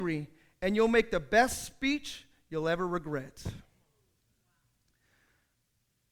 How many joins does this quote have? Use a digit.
0